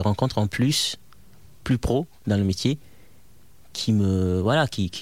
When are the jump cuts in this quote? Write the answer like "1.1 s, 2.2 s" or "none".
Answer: none